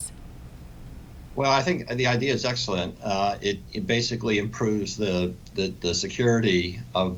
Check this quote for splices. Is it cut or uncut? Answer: uncut